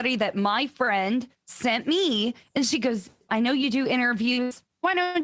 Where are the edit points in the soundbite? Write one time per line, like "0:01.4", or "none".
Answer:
0:01.3
0:03.3